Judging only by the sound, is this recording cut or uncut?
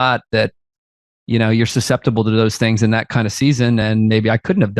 uncut